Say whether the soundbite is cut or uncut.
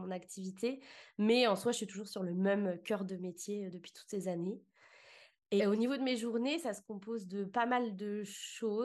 cut